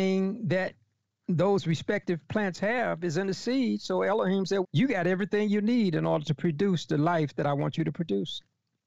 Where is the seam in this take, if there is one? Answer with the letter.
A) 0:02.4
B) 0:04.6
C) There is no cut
B